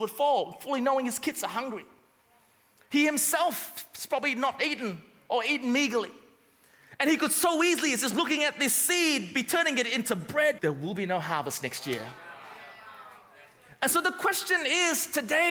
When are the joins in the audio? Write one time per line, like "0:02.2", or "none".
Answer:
0:10.6

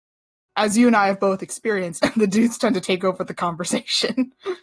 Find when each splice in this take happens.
0:02.0

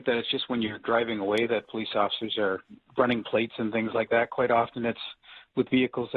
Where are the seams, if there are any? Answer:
none

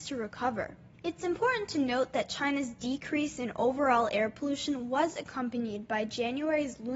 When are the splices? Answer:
none

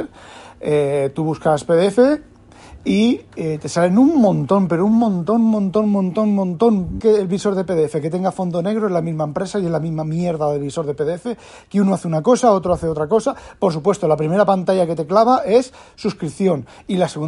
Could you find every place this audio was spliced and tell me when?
0:07.0

